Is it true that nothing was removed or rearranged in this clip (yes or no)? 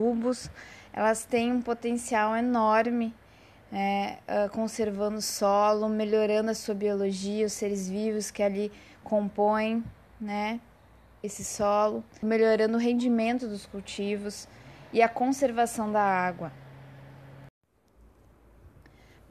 no